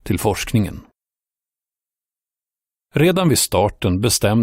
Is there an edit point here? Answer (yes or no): no